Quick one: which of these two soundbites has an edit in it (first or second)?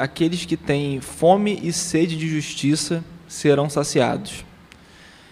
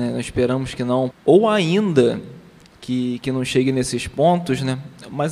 second